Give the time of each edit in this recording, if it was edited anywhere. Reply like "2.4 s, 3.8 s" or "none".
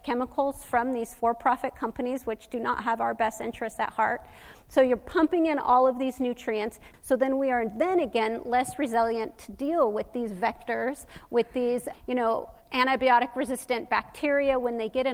6.9 s, 11.9 s